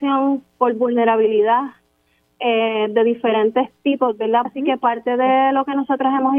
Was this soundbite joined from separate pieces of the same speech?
yes; 1 cut; at 4.4 s

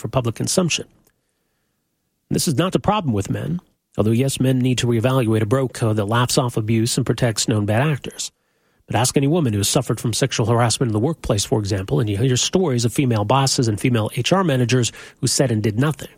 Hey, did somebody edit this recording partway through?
yes; 1 cut; at 2.7 s

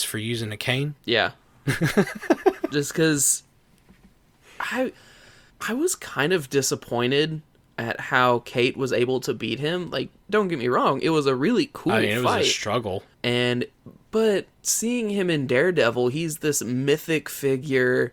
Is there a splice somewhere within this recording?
yes; 1 cut; at 1.0 s

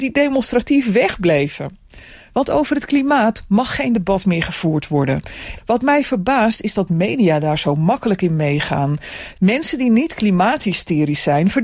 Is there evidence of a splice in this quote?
yes; 2 cuts; at 5.6 s, 9.3 s

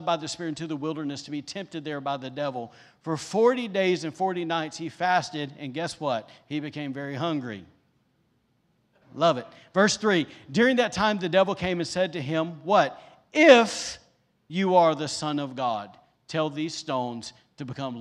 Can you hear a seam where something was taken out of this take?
no; 0 cuts

